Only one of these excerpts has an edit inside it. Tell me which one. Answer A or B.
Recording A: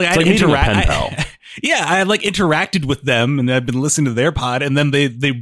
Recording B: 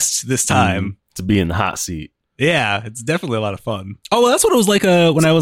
B